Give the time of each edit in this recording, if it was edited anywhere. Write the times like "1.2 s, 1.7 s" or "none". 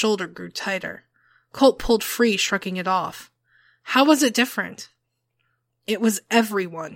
none